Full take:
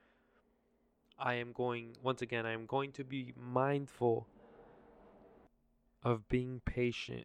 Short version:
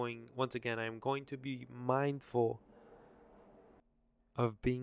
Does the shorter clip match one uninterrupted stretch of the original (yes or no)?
yes